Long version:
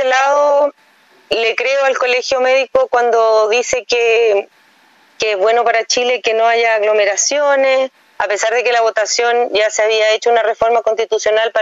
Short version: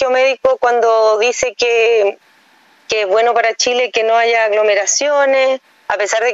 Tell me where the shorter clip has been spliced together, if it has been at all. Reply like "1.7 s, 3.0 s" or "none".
none